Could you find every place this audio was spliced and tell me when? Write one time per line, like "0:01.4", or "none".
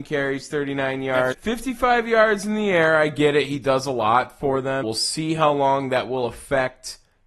0:01.3
0:04.8

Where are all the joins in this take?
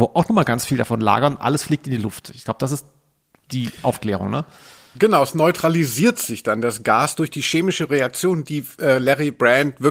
none

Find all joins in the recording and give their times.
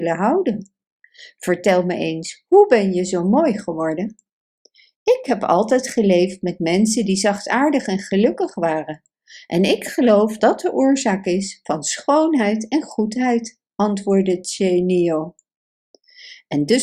0:10.4

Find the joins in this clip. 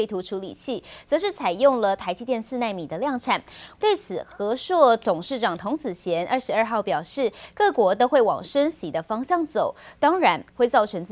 0:03.7

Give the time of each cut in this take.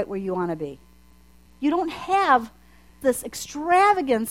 0:01.5
0:03.0

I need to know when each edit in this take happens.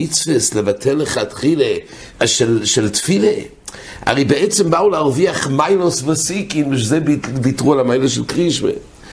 0:02.1

